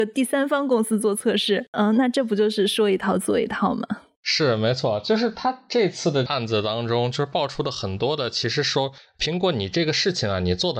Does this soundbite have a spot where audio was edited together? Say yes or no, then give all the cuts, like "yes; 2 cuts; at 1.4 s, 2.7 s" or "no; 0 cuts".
yes; 1 cut; at 1.7 s